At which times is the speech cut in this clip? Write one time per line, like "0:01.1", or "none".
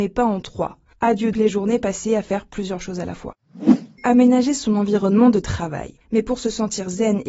0:01.3
0:04.0
0:06.0